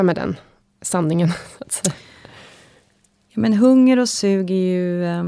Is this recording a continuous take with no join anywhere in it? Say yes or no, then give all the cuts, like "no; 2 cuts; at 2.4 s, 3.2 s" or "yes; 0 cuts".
yes; 0 cuts